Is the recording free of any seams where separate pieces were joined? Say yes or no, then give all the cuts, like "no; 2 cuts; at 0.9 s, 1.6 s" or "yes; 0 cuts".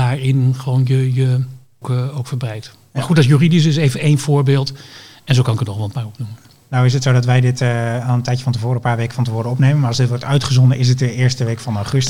no; 1 cut; at 1.8 s